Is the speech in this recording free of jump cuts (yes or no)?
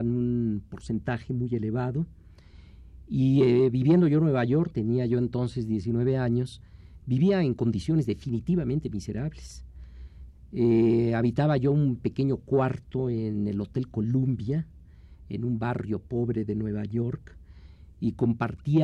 yes